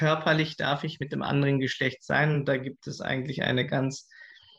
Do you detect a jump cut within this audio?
no; 0 cuts

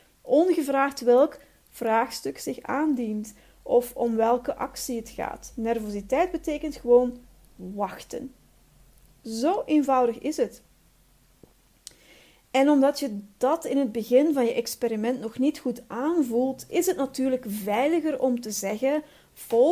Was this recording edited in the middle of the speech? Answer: no; 0 cuts

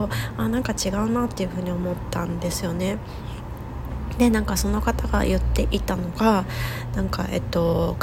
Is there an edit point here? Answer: no; 0 cuts

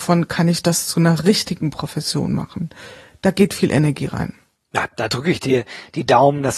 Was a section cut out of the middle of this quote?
no; 0 cuts

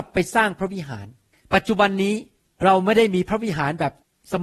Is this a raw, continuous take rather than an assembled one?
yes; 0 cuts

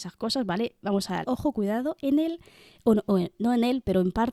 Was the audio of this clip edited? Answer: yes; 1 cut; at 1.2 s

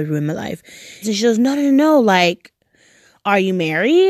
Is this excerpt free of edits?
no; 1 cut; at 1.0 s

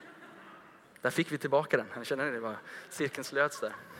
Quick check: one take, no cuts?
yes; 0 cuts

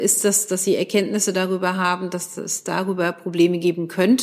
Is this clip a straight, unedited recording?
yes; 0 cuts

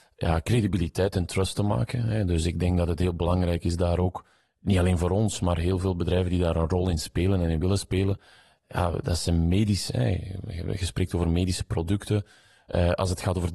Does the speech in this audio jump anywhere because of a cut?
no; 0 cuts

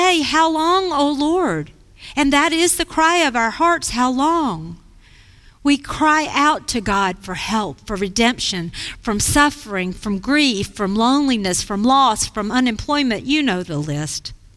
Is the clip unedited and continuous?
yes; 0 cuts

